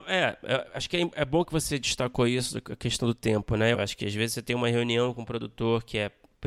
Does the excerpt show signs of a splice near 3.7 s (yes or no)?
yes